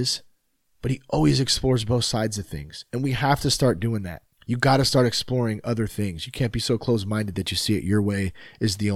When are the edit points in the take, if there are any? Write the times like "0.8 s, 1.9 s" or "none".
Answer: 4.3 s